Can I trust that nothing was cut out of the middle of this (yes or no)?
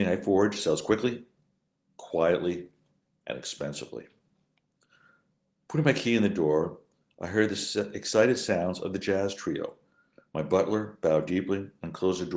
yes